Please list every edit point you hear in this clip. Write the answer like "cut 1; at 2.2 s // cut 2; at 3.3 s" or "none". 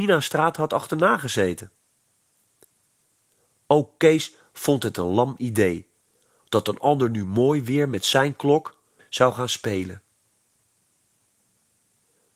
cut 1; at 9.0 s